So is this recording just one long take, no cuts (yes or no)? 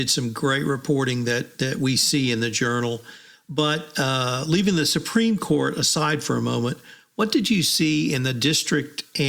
yes